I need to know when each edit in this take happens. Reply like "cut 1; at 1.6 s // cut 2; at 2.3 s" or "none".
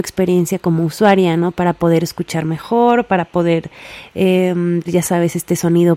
cut 1; at 4.9 s